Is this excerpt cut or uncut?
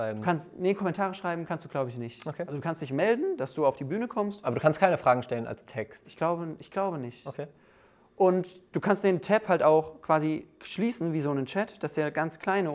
uncut